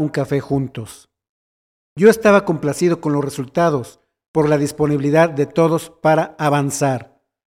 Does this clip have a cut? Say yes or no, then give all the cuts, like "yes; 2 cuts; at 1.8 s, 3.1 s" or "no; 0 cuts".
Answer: no; 0 cuts